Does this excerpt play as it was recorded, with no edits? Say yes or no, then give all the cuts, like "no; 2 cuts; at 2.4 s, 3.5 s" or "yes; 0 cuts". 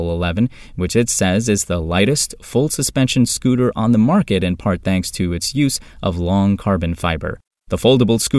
yes; 0 cuts